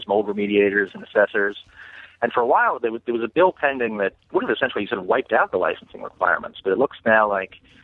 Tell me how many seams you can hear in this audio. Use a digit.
1